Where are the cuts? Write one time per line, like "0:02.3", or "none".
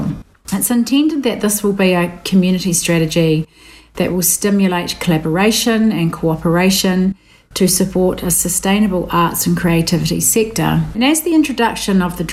none